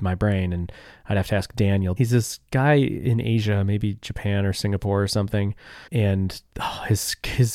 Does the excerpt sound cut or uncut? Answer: cut